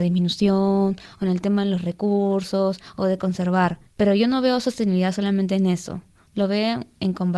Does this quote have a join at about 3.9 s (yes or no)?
yes